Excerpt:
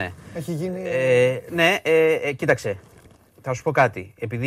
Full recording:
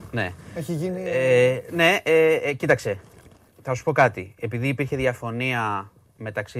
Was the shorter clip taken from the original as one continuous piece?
yes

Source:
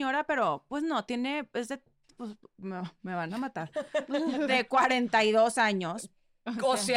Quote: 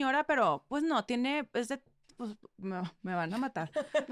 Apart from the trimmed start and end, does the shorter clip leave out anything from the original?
no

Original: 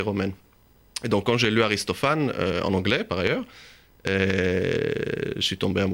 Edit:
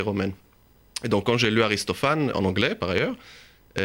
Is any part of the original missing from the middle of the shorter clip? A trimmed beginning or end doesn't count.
yes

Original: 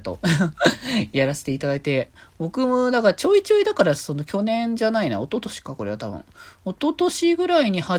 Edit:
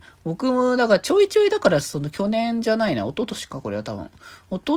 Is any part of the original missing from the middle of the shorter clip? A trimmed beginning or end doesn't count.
no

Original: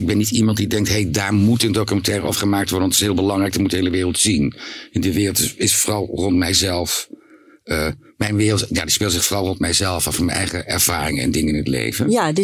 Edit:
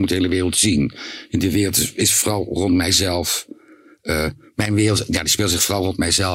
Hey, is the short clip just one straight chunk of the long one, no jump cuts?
yes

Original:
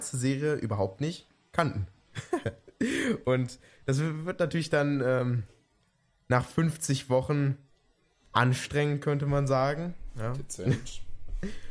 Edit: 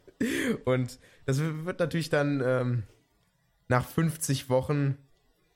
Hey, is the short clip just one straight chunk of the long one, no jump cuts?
yes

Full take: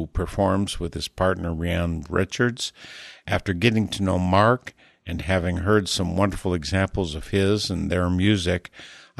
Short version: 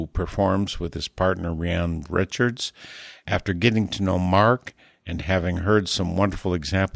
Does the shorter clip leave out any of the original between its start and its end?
no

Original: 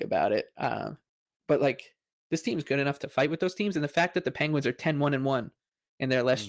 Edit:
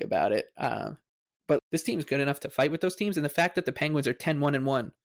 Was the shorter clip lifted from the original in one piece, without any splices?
no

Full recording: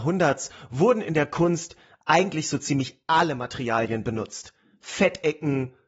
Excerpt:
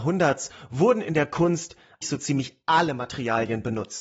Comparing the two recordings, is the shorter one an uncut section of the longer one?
no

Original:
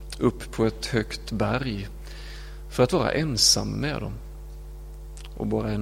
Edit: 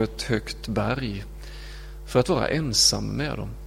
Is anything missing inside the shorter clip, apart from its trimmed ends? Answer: no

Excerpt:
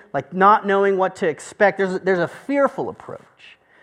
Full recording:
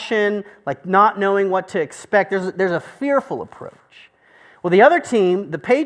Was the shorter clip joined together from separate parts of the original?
no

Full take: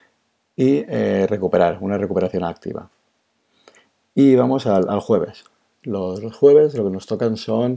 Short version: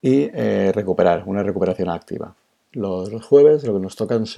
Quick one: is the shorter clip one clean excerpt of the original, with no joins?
no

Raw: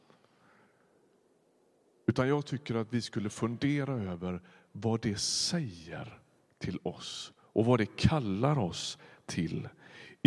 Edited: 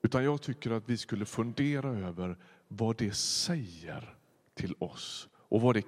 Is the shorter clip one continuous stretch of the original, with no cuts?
yes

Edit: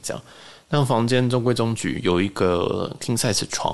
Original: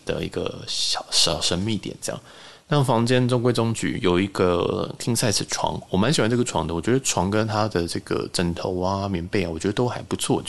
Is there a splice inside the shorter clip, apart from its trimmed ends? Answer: no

